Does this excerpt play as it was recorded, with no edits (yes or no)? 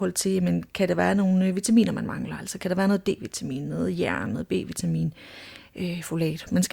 yes